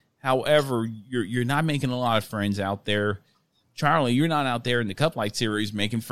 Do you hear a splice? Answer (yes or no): yes